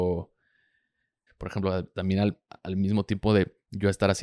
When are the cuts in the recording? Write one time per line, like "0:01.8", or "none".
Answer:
0:01.3